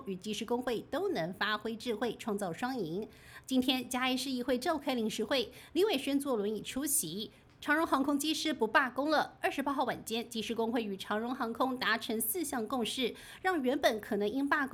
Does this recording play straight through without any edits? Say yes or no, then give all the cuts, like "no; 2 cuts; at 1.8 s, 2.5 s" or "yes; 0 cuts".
no; 2 cuts; at 3.4 s, 7.4 s